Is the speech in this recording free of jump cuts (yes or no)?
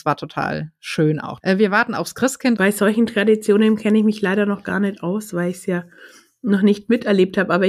no